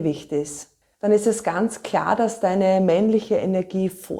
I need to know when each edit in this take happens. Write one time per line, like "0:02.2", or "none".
0:00.9